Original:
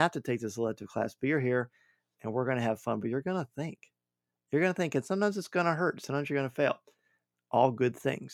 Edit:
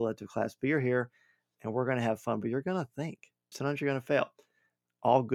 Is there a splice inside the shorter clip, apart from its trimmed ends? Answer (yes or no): yes